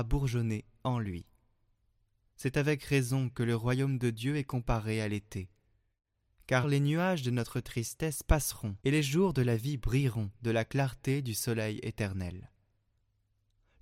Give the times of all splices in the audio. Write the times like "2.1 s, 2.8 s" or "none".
6.6 s, 8.8 s